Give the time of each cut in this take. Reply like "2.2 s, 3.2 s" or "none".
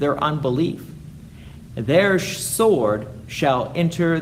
1.7 s